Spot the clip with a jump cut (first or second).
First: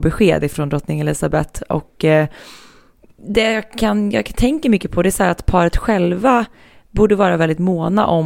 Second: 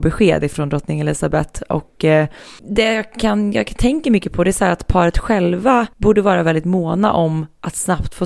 second